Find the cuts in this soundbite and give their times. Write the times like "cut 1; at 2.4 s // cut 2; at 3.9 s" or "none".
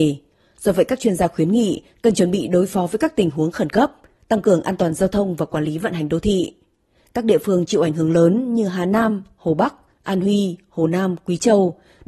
none